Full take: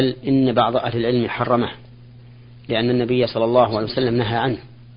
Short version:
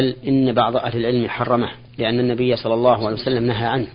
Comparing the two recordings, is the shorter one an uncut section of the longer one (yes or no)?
no